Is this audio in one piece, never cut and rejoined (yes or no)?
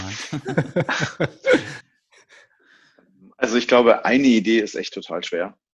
no